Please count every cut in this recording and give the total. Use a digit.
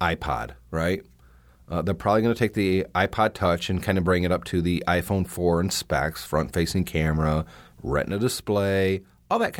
0